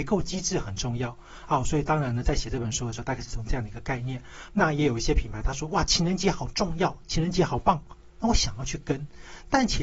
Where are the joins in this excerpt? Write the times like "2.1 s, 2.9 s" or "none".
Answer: 4.5 s